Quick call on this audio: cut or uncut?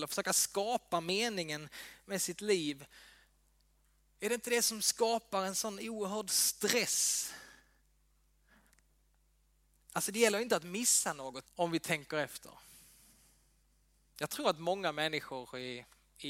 cut